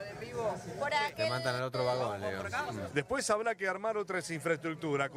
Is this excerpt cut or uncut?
cut